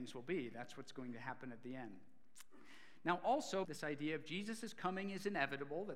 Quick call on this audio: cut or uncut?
cut